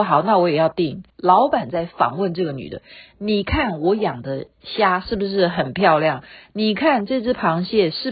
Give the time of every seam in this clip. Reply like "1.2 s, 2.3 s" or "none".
1.1 s